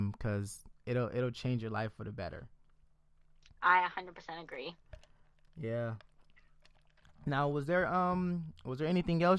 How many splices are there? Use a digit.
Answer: 0